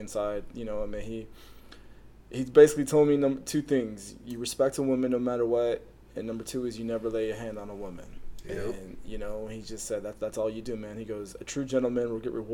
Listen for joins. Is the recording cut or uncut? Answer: uncut